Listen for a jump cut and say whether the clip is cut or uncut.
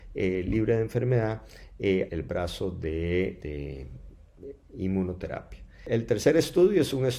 cut